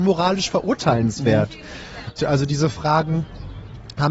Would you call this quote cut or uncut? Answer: cut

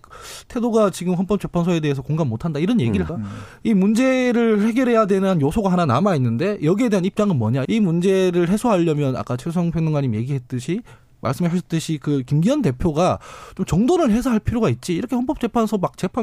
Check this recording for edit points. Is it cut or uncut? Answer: cut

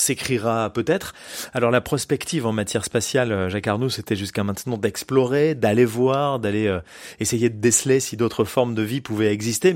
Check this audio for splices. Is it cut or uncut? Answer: uncut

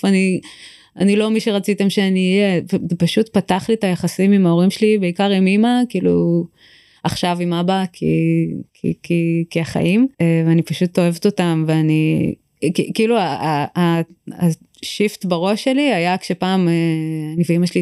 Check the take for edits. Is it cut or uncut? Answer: cut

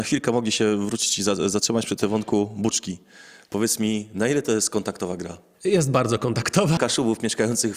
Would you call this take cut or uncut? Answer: cut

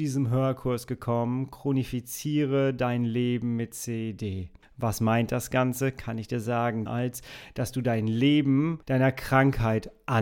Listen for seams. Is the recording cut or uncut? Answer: cut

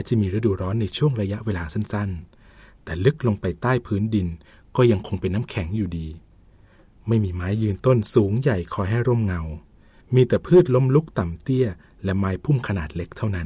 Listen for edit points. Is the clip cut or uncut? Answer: uncut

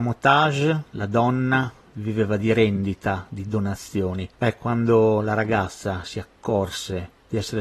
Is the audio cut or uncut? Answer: uncut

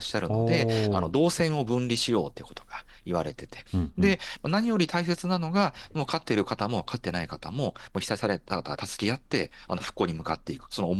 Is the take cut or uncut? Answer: cut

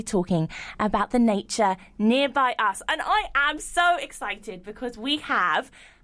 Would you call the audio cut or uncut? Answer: uncut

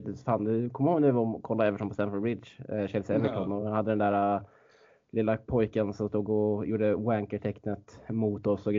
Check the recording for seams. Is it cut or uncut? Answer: uncut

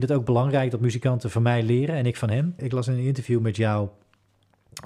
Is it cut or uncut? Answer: cut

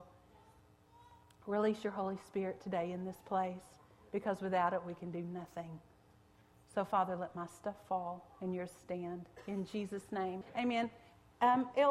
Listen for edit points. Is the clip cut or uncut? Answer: cut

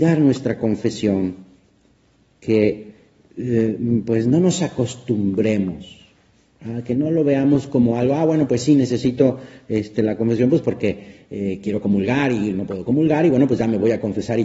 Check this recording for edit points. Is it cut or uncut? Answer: uncut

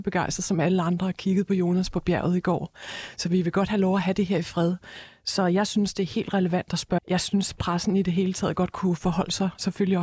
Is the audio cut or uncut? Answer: cut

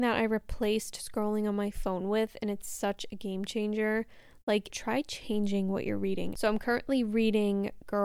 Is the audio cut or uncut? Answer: cut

